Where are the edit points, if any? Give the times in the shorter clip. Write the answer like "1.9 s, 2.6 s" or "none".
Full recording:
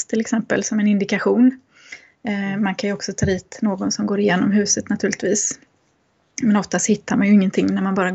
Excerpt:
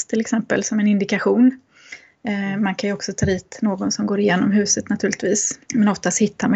5.6 s